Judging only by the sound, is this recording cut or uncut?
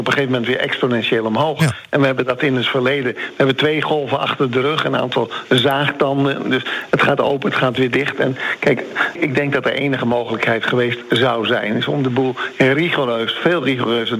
cut